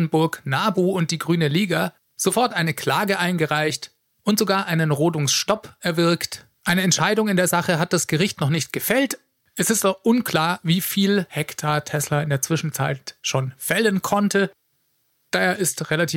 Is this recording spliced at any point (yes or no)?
yes